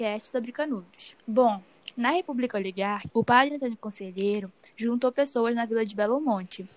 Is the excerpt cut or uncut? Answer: cut